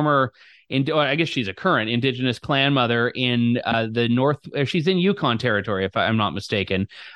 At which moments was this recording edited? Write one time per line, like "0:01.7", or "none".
none